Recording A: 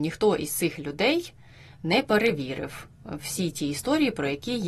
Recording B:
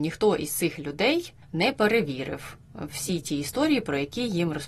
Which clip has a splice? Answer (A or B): B